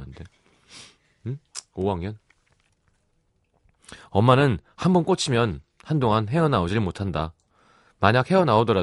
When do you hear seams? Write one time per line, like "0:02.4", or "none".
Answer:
none